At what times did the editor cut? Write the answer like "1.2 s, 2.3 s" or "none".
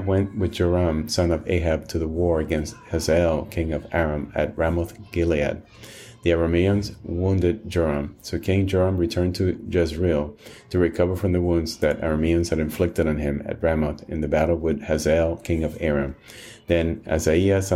none